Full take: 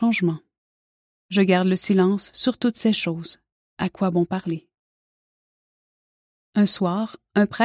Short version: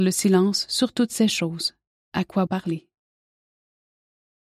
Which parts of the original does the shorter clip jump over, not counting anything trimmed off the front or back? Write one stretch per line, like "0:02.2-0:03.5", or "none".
0:04.1-0:04.3

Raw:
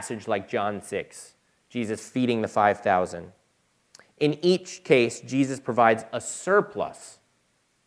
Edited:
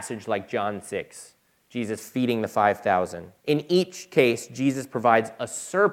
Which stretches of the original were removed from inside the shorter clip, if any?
0:03.4-0:04.1

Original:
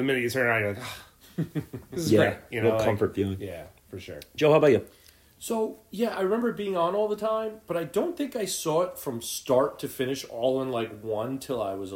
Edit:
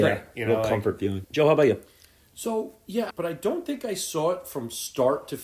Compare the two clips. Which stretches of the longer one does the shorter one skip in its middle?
0:03.4-0:04.3
0:06.1-0:07.6

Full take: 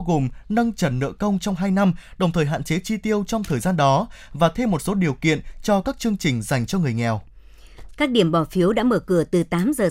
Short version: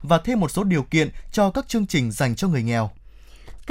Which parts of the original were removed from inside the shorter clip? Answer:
none

